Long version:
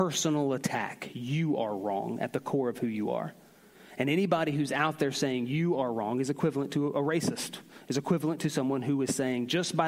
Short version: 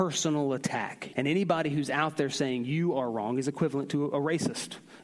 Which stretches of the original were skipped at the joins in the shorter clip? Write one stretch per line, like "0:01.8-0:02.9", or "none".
0:01.1-0:04.0